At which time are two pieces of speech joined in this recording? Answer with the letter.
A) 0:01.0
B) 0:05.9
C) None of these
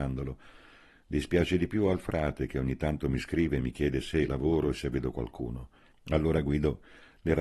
B